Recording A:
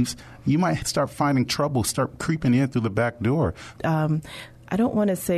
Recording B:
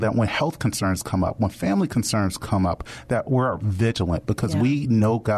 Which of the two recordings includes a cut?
A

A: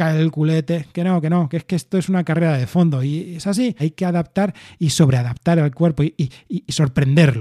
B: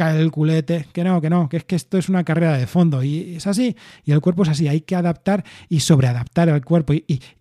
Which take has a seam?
A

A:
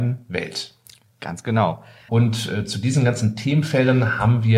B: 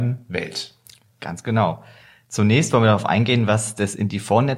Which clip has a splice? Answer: A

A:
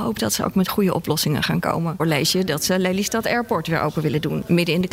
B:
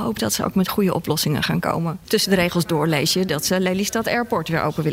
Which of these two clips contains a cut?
A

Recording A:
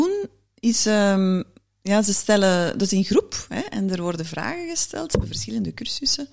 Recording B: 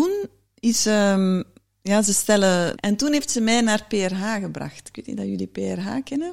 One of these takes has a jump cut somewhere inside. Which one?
B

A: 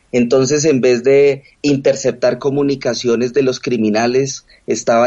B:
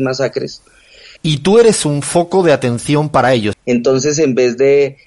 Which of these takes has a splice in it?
B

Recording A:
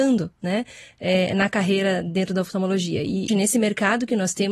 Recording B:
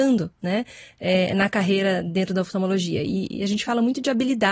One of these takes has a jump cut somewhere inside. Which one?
A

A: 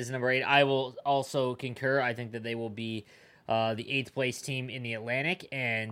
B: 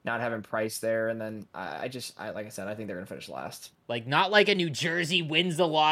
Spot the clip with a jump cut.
B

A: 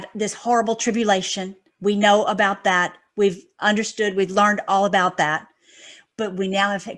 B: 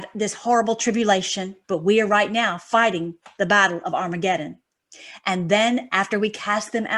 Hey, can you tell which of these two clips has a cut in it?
B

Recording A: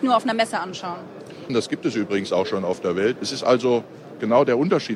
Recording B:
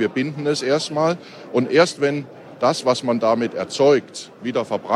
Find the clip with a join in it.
A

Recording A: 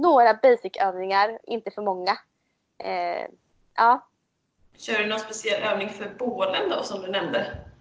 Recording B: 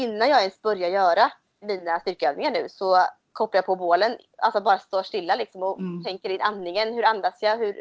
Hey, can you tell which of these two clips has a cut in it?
B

